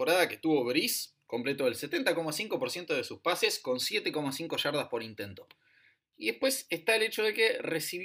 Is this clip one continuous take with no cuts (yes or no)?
no